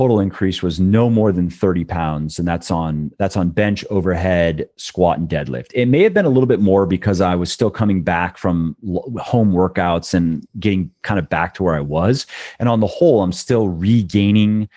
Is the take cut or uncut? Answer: uncut